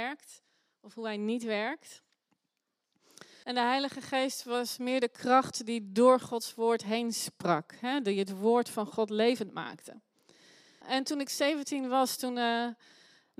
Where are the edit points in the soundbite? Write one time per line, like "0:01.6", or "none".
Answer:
0:03.4
0:10.8